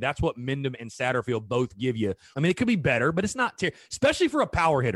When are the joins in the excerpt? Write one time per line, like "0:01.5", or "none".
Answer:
0:02.3